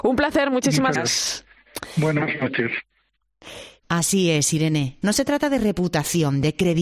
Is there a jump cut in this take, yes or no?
yes